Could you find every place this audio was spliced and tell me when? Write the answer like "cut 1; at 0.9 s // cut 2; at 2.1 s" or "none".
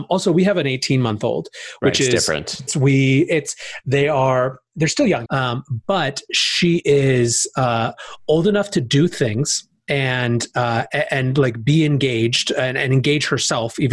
cut 1; at 2.7 s // cut 2; at 5.3 s